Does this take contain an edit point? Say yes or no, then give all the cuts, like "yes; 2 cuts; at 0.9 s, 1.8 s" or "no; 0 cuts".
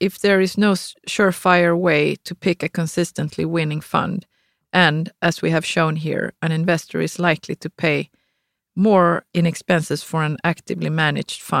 yes; 1 cut; at 9.3 s